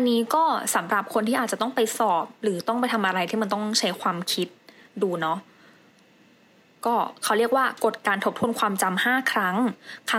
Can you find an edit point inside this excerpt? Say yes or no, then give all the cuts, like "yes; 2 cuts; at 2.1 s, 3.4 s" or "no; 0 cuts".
no; 0 cuts